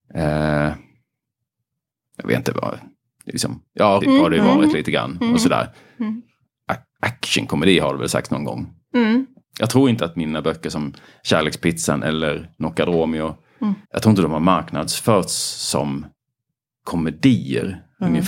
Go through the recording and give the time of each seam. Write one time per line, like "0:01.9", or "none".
0:04.0
0:09.4
0:13.8